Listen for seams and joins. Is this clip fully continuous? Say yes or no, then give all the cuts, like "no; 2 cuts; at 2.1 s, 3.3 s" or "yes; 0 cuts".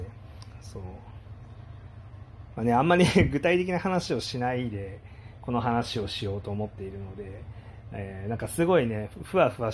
yes; 0 cuts